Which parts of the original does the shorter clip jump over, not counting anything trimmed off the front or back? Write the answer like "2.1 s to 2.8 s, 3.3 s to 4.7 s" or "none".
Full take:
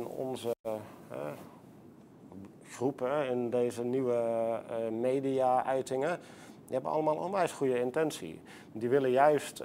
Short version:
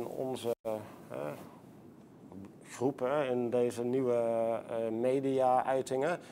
none